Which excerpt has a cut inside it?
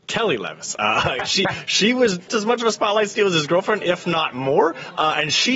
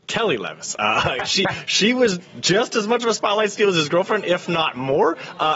first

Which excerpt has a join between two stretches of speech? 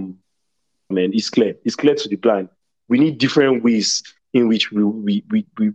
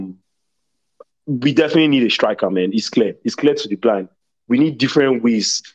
first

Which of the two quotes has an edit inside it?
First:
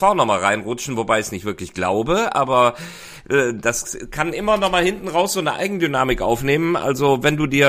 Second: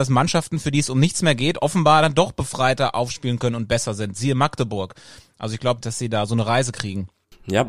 second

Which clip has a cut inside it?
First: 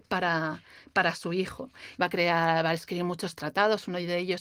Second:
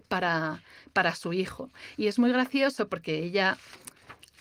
first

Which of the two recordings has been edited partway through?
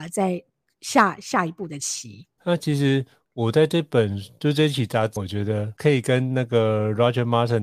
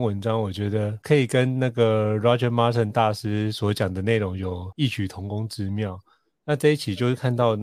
first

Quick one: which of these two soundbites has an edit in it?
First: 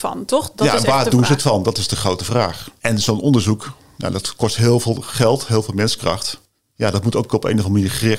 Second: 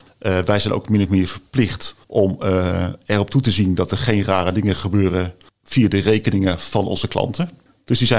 second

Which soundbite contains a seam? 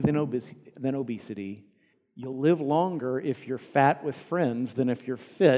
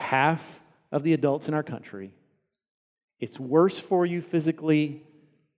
first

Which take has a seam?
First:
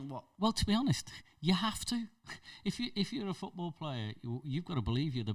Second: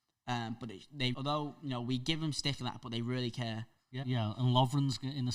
second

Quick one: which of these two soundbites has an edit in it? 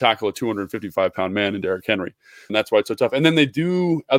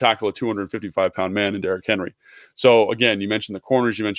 first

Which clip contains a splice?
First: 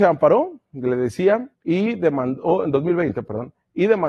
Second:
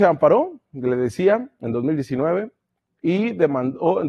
first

